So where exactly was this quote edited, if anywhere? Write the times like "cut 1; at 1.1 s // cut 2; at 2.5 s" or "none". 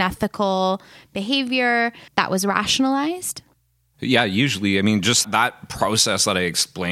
cut 1; at 2.1 s // cut 2; at 5.2 s